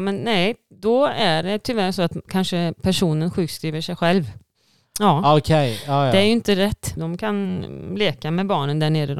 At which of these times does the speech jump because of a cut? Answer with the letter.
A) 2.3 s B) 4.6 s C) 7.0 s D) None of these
C